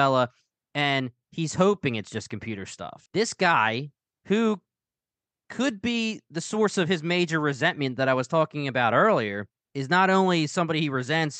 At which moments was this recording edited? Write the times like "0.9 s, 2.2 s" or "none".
none